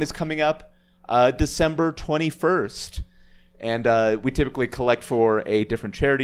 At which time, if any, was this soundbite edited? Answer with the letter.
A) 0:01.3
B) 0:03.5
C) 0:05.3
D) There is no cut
D